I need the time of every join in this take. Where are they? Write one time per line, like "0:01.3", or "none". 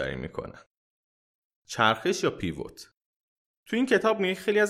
none